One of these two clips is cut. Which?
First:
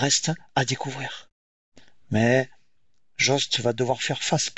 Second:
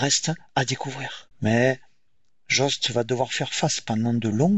second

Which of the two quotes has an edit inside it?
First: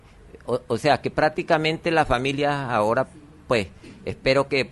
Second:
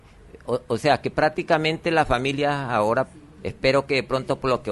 second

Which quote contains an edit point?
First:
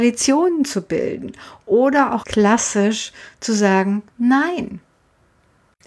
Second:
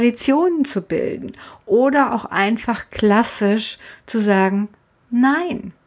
first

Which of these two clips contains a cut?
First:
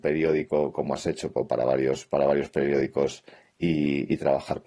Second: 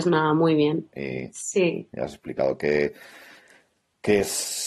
second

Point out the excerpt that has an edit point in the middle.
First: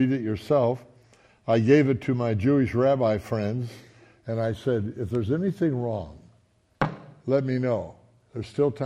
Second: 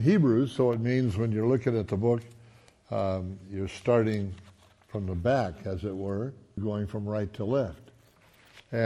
second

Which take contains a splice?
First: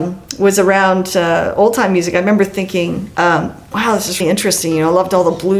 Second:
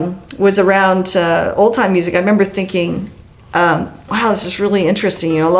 first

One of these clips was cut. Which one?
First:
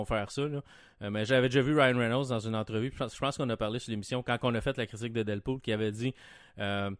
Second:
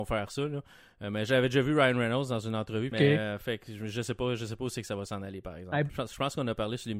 second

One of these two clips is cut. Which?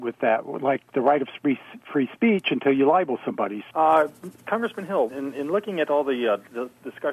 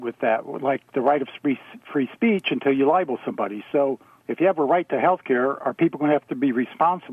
first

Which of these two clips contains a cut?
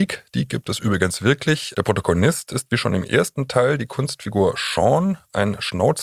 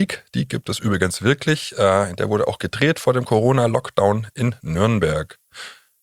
first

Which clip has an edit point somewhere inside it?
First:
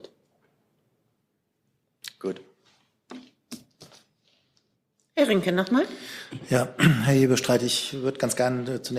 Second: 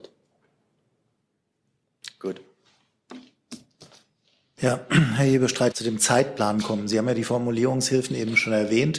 second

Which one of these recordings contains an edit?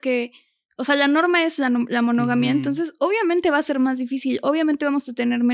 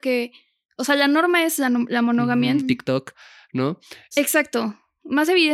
second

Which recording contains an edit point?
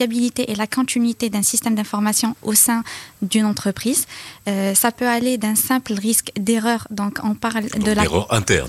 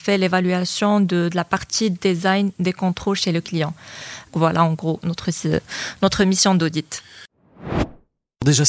second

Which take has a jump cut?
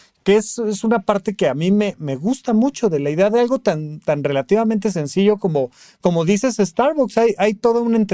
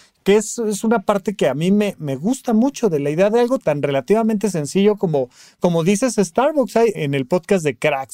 second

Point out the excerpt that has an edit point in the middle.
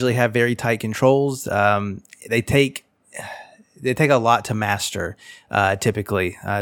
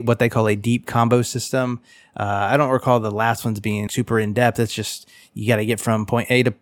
second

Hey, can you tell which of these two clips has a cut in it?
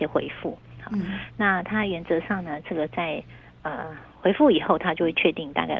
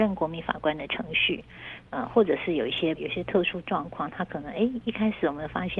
second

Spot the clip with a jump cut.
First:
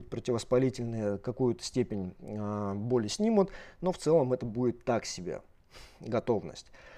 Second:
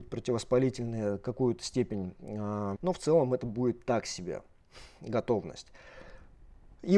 second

